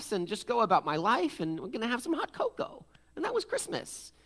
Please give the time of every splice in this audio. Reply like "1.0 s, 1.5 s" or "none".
none